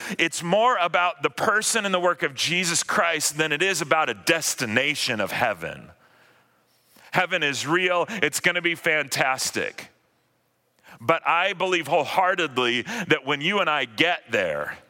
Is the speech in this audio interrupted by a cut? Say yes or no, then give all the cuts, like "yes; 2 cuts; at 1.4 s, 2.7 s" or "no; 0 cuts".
no; 0 cuts